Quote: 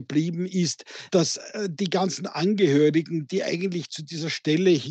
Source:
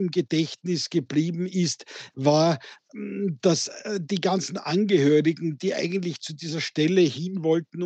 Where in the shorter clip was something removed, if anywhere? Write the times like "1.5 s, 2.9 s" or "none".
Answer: 1.1 s